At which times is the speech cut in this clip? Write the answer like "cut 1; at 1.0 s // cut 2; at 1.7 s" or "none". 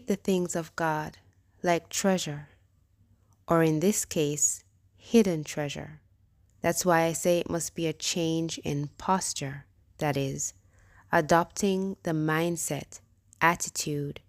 cut 1; at 6.5 s